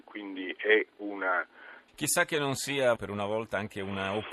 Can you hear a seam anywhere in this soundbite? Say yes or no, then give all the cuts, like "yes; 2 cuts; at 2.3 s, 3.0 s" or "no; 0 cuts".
yes; 2 cuts; at 1.9 s, 3.0 s